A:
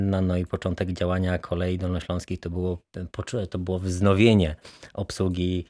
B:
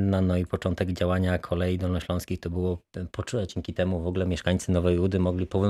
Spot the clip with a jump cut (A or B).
B